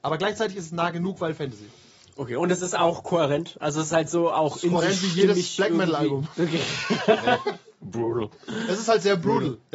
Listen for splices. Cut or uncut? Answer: uncut